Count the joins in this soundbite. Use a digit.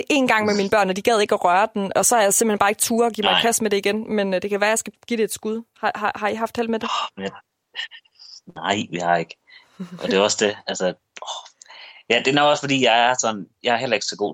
0